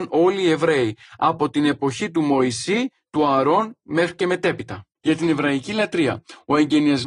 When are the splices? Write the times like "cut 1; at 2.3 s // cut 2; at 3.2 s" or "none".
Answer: cut 1; at 4.9 s